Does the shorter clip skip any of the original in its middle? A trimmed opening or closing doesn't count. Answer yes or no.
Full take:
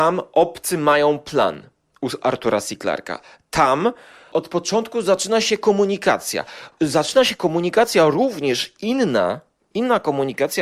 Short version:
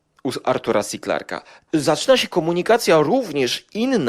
yes